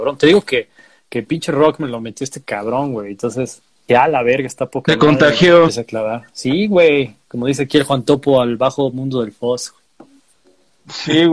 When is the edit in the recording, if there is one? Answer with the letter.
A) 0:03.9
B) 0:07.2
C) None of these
A